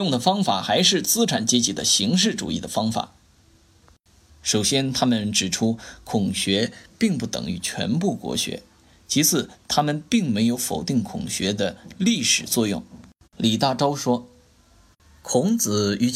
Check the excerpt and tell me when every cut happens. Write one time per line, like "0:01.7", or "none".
0:04.3